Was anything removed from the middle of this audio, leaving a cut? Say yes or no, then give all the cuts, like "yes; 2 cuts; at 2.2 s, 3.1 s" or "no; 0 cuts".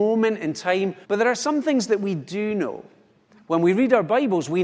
yes; 1 cut; at 1.0 s